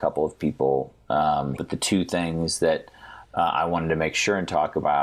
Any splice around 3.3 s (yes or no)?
no